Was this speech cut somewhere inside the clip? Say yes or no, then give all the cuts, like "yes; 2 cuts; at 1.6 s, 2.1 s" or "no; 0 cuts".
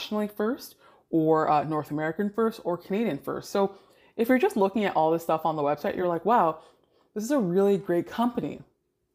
no; 0 cuts